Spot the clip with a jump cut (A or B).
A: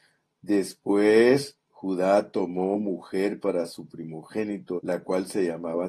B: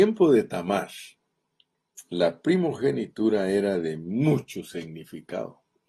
A